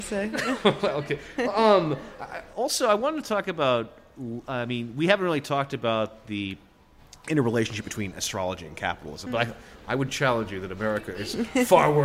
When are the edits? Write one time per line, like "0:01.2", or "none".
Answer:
0:09.3

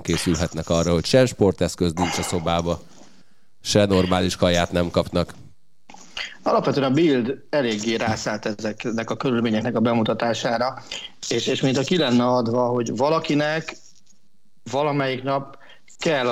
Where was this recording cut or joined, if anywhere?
none

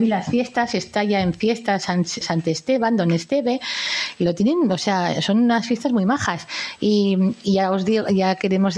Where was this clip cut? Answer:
0:02.2

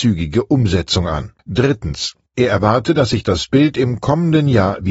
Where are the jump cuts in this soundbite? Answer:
0:01.4

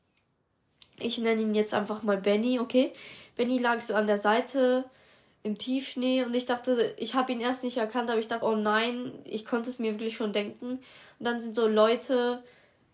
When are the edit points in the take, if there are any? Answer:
0:08.4

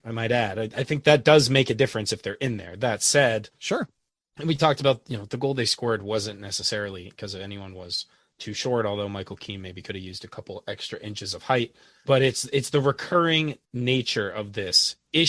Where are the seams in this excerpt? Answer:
0:12.0
0:13.6

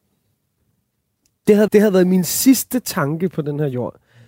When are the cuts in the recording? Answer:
0:01.7

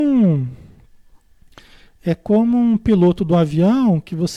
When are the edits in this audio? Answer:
none

